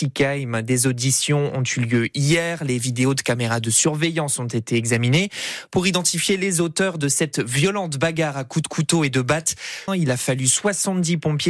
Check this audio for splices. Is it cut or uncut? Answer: cut